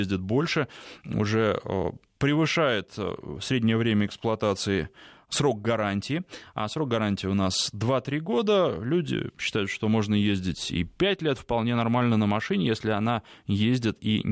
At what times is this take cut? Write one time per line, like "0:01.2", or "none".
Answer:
none